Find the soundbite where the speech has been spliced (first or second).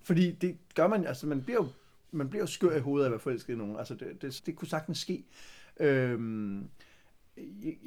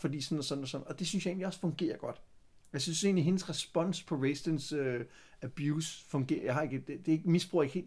first